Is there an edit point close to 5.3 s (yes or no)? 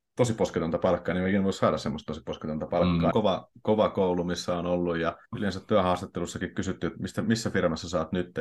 yes